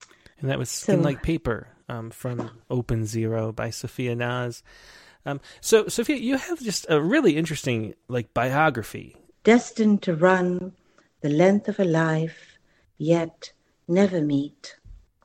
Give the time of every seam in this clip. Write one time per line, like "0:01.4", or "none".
0:09.3